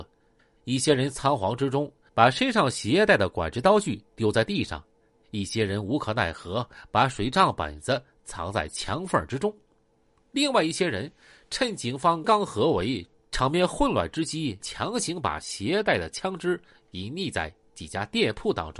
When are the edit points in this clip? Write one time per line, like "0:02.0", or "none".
0:12.2
0:14.6